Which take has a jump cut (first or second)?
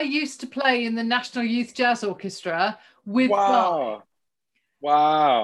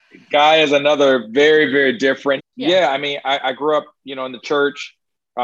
second